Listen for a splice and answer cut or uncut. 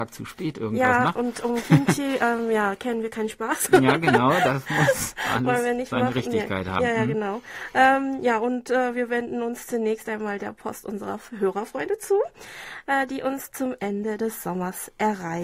uncut